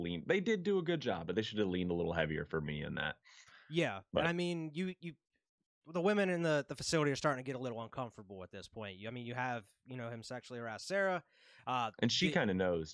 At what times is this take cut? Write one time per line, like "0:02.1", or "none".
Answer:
none